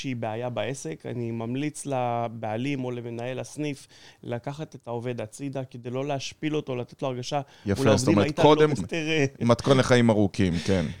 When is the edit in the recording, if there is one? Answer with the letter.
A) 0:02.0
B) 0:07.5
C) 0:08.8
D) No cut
C